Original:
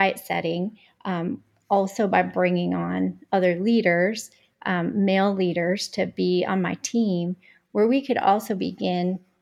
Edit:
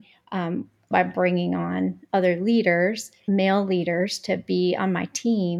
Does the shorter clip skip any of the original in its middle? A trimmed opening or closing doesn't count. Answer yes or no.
yes